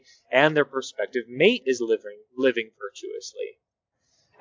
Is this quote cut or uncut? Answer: uncut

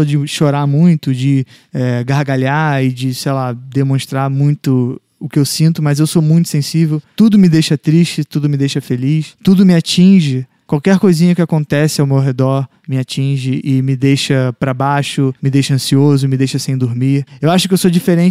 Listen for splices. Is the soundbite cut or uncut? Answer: cut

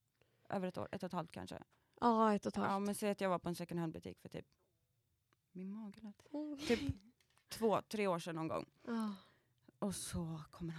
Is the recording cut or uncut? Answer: uncut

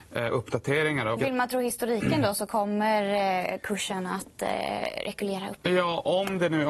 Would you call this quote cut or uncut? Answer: cut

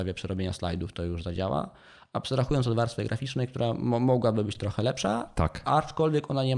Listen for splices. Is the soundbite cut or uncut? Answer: uncut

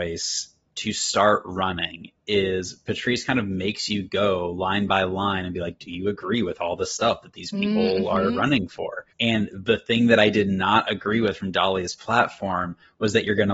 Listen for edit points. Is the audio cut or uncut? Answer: cut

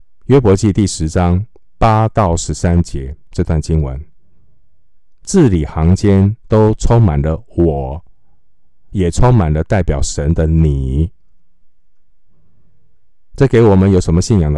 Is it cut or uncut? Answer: uncut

